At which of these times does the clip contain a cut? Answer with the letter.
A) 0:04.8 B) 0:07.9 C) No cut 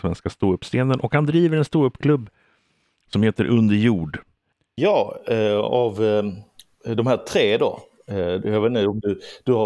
A